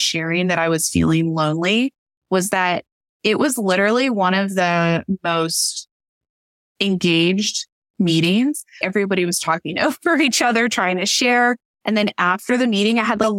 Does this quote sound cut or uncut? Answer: uncut